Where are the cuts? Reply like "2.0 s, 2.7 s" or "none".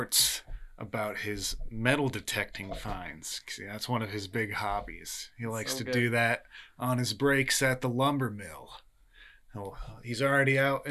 none